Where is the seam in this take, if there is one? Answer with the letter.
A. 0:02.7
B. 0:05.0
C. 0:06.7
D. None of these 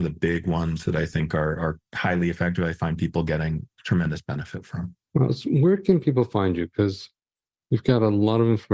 B